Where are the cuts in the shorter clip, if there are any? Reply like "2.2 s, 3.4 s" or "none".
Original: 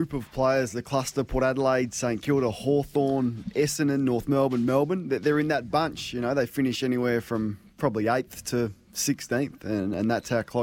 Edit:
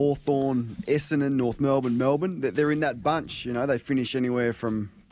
none